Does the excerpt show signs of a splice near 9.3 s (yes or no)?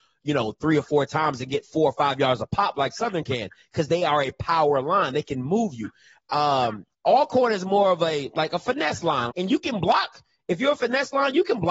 yes